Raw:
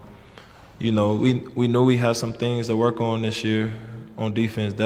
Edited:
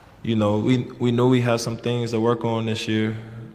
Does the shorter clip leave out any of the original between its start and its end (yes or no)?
no